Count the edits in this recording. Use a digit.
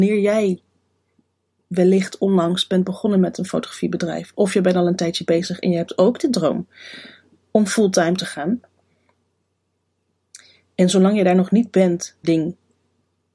1